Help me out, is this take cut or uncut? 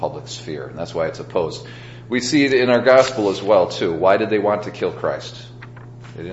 uncut